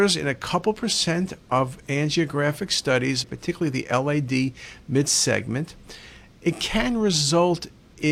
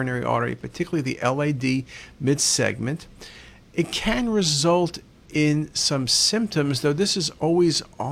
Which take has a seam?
first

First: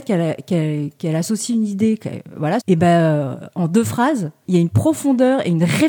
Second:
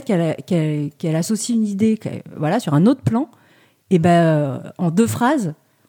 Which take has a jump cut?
first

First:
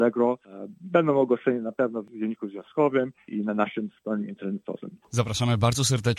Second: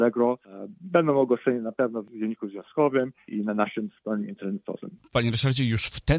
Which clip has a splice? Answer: second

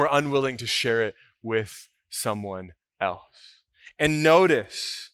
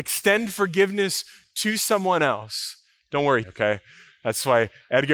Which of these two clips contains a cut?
second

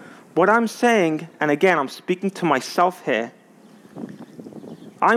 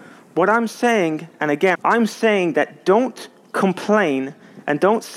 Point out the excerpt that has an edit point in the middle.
second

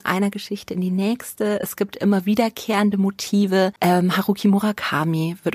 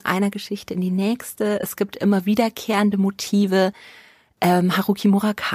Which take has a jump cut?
first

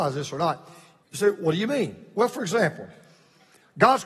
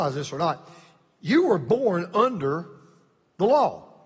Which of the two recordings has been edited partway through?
first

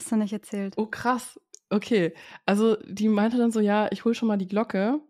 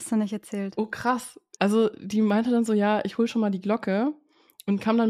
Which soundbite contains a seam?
second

